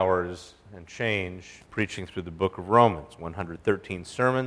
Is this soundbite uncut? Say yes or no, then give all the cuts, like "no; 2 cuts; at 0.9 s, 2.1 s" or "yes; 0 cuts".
no; 1 cut; at 1.7 s